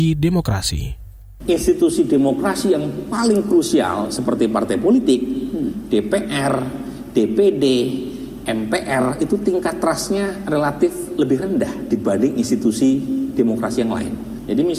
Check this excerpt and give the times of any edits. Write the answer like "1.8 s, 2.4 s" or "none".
none